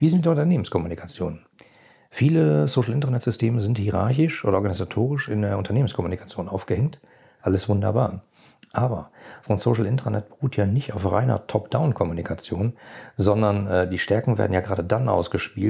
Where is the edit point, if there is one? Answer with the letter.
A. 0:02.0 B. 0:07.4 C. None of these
B